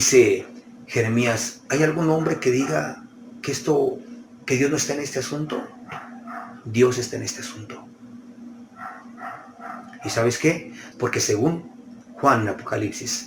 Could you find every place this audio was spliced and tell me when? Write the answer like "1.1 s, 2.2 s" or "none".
10.9 s